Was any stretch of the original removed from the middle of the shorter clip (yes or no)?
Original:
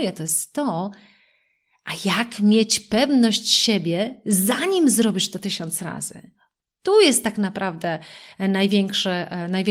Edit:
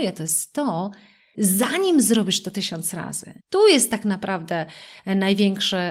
yes